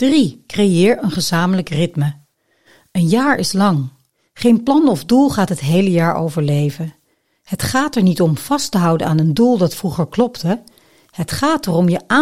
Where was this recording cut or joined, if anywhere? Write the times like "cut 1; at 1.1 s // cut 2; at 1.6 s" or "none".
none